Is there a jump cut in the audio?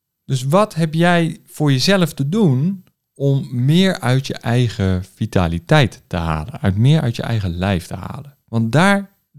no; 0 cuts

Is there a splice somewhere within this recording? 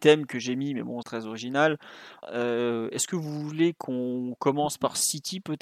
yes; 2 cuts; at 1.0 s, 2.2 s

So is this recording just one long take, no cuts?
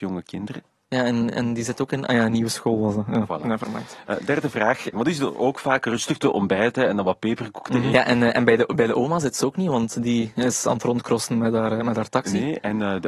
no; 2 cuts; at 4.9 s, 7.9 s

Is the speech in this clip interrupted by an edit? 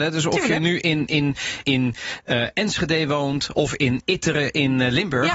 yes; 1 cut; at 1.6 s

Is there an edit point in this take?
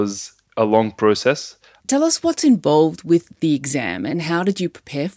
yes; 1 cut; at 1.8 s

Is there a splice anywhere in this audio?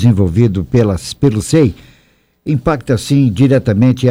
no; 0 cuts

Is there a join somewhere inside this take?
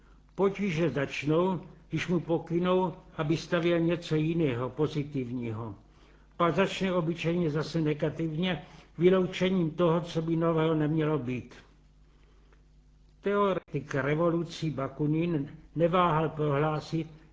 no; 0 cuts

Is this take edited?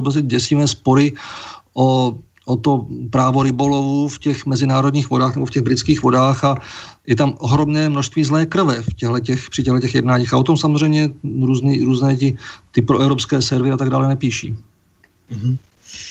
no; 0 cuts

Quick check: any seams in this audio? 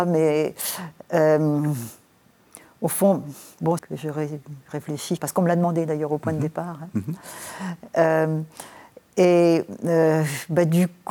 yes; 2 cuts; at 3.8 s, 5.2 s

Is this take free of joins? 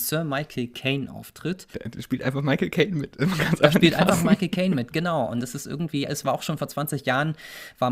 yes; 0 cuts

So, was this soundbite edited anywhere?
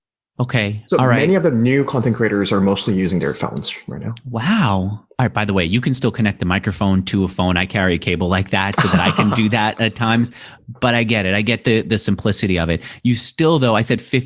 no; 0 cuts

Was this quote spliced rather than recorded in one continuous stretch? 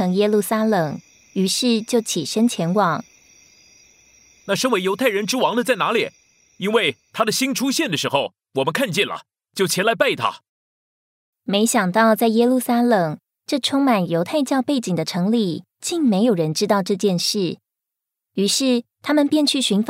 yes; 1 cut; at 11.3 s

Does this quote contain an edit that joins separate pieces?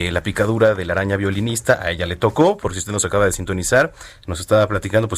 no; 0 cuts

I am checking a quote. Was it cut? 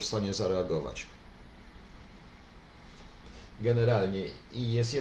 no; 0 cuts

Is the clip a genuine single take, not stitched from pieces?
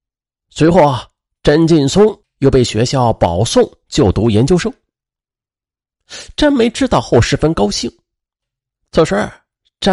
yes; 0 cuts

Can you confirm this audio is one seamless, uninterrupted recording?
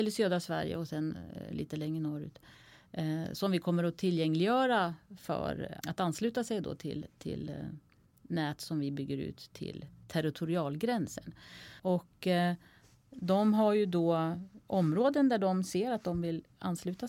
no; 2 cuts; at 5.8 s, 11.8 s

